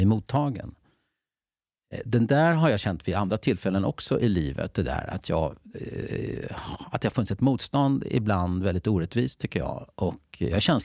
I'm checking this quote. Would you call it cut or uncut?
uncut